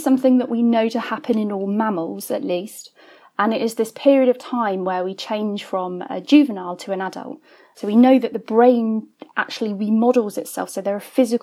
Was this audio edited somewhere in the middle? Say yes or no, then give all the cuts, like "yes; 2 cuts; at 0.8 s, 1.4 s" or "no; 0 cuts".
no; 0 cuts